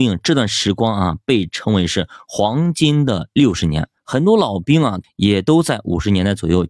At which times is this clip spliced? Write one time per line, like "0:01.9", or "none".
0:04.0
0:05.0